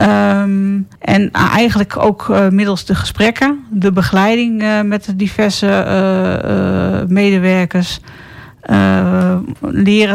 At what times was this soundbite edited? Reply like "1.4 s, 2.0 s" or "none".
1.0 s